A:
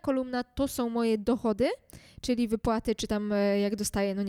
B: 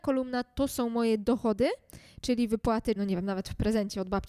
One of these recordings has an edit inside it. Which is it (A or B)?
B